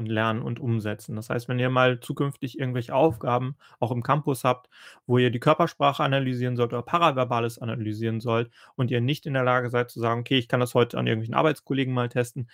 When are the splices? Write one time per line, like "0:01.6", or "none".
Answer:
none